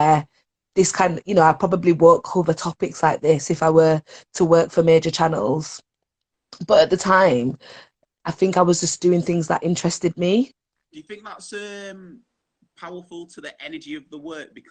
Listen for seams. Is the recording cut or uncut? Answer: uncut